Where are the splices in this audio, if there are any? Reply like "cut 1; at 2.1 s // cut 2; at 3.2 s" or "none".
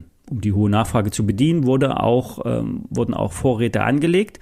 none